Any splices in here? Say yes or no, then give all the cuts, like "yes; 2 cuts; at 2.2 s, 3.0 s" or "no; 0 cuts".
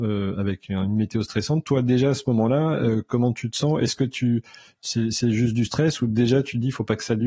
no; 0 cuts